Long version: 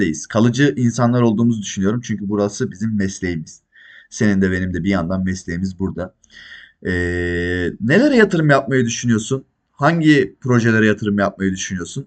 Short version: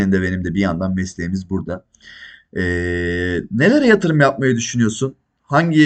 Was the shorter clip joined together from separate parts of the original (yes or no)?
no